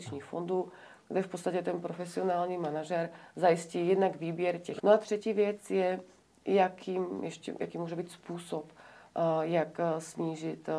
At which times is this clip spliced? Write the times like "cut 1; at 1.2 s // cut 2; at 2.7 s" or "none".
cut 1; at 4.8 s